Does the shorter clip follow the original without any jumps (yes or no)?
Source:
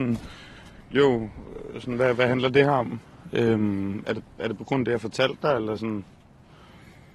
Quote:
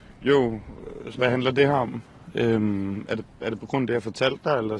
no